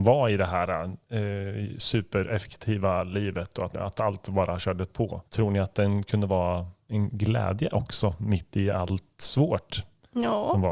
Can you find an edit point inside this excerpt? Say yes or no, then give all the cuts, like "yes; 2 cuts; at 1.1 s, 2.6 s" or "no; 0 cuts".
yes; 2 cuts; at 3.7 s, 5.3 s